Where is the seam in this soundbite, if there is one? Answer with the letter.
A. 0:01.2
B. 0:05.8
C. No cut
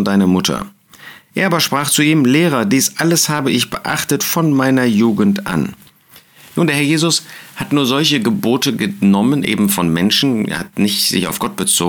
C